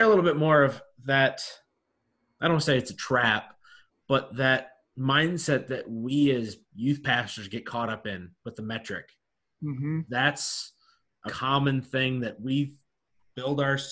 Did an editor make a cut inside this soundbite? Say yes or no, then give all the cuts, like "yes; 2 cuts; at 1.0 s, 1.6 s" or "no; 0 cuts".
yes; 2 cuts; at 10.1 s, 11.3 s